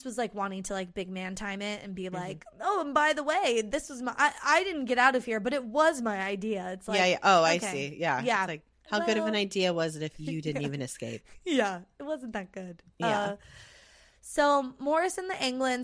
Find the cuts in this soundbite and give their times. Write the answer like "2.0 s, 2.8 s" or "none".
8.7 s